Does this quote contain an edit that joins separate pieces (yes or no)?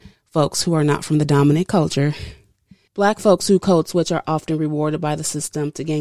yes